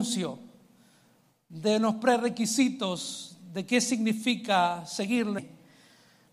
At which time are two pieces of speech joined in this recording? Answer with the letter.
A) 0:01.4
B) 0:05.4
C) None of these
B